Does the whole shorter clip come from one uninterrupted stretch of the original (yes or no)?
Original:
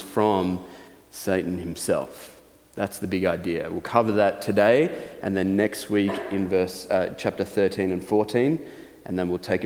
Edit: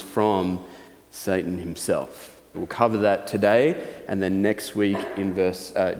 no